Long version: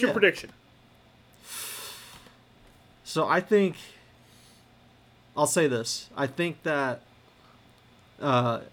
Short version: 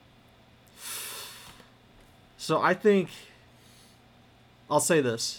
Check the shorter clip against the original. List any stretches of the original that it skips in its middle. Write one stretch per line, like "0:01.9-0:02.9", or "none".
none